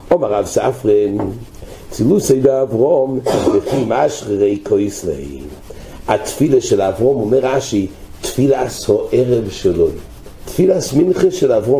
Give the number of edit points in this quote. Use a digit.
1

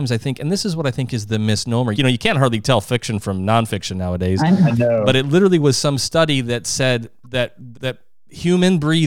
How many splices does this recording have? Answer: 2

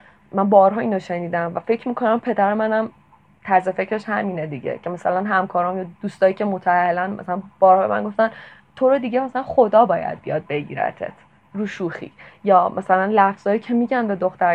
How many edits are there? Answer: 1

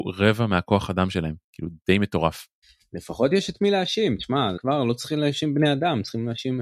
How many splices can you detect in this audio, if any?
2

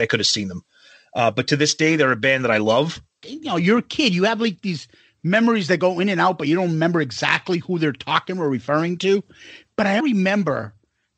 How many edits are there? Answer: 2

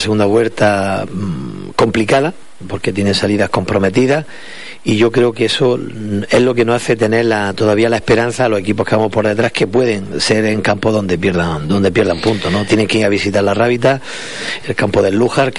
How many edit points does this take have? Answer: 0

